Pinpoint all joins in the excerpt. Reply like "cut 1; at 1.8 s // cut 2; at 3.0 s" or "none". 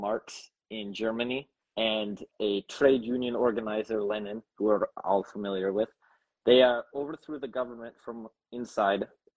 cut 1; at 2.3 s